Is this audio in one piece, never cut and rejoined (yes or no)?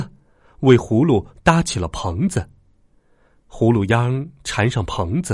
yes